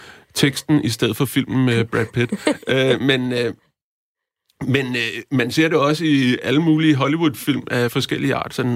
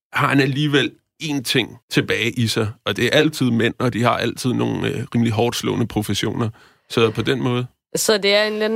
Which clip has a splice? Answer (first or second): second